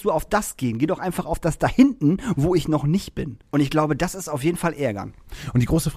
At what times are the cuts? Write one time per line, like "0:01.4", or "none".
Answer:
0:03.4